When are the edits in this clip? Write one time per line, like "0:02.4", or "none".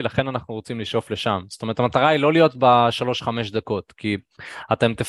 none